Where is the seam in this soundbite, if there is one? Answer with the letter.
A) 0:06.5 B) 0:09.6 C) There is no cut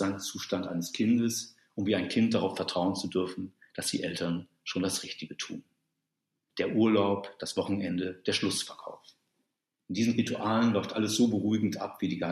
A